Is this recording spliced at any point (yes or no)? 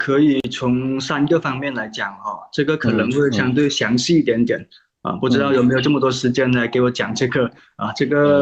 no